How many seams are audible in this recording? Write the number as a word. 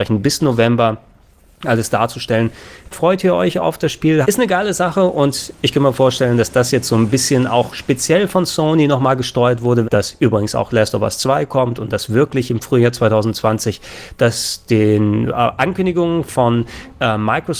three